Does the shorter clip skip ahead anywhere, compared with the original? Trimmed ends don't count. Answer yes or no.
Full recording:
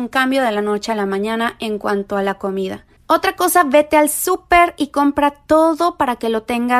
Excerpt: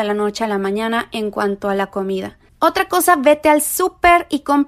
no